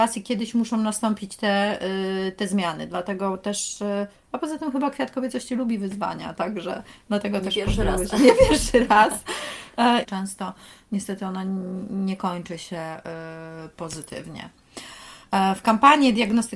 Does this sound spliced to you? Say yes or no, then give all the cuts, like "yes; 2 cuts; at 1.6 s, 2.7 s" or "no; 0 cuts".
yes; 1 cut; at 10.0 s